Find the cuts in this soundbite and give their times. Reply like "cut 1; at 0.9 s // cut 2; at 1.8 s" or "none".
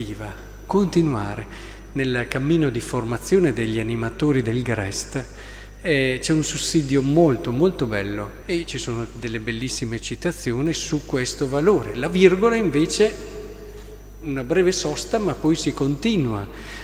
cut 1; at 8.4 s